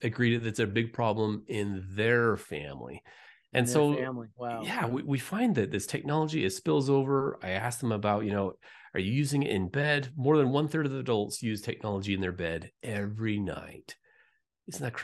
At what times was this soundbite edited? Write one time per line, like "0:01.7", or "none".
none

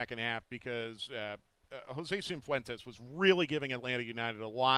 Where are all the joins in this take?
none

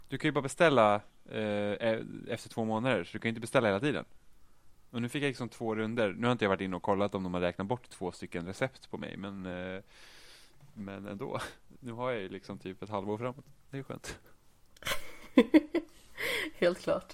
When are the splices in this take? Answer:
none

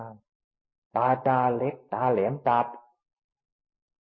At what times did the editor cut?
0:01.2

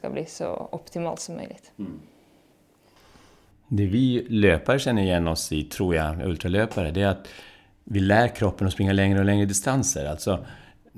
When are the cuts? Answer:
none

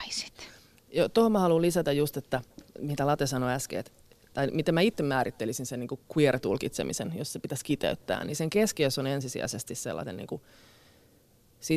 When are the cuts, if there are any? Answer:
none

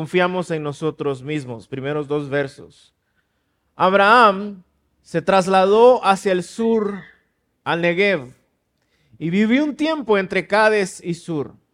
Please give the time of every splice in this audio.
0:03.6

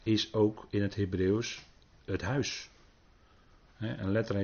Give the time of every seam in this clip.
none

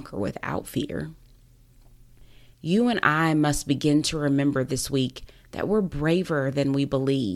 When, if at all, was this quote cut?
0:02.5

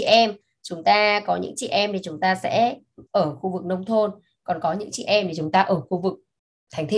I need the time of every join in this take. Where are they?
0:03.1

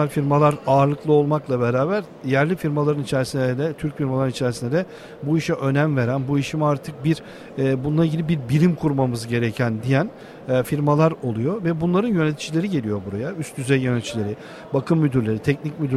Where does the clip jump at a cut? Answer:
none

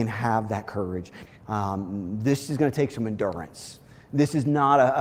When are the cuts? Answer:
0:01.3

